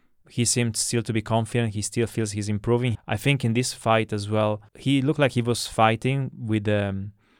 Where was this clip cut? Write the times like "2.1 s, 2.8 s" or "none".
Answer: 2.9 s, 4.7 s